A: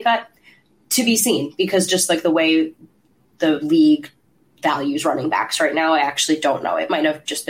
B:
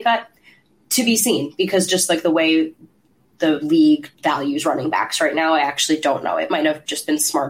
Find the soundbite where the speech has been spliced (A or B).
B